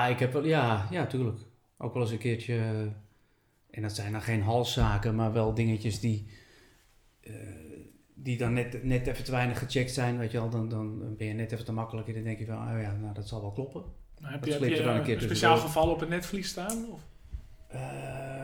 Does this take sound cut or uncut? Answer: uncut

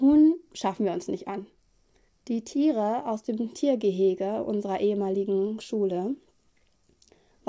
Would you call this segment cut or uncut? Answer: cut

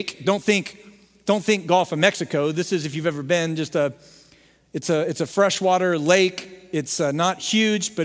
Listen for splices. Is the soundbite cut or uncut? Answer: uncut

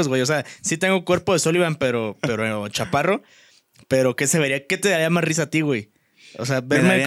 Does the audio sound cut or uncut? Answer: uncut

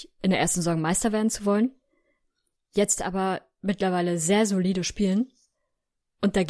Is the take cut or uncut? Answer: uncut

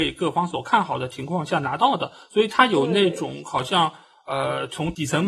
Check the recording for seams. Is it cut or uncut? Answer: uncut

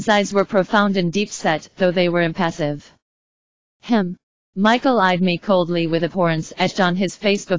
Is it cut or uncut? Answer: cut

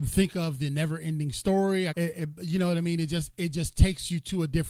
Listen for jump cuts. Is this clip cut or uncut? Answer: cut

